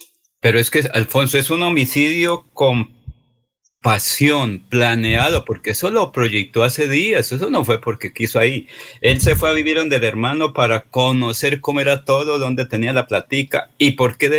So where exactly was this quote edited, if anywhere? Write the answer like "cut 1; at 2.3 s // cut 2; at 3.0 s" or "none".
none